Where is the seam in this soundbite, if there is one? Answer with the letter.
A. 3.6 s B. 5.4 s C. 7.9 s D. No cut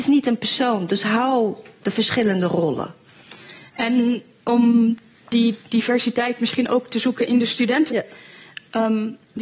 C